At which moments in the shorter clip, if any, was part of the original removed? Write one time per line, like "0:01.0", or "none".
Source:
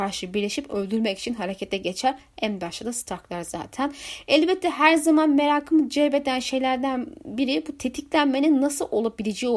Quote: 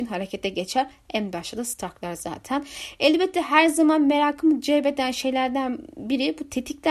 none